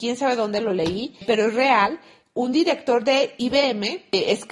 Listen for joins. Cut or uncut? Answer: uncut